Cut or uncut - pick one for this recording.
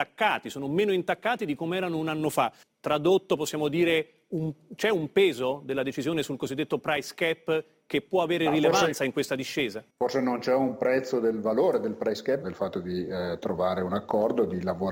cut